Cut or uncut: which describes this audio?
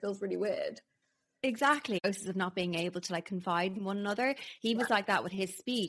uncut